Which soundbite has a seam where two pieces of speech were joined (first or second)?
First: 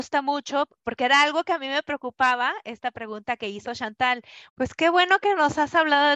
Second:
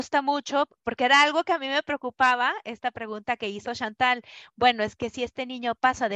first